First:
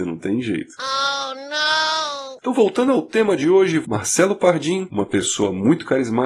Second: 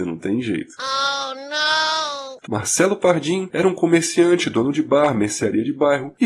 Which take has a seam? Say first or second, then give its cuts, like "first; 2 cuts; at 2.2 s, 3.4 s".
second; 2 cuts; at 2.5 s, 3.5 s